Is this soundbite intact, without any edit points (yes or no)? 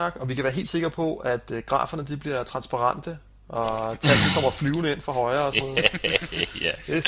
yes